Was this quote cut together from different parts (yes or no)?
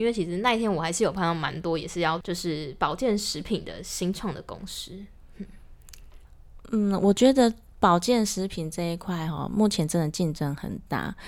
no